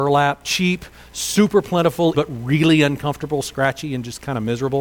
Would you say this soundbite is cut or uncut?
cut